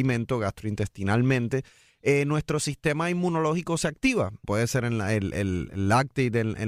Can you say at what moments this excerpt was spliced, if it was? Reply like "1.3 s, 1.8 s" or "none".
4.4 s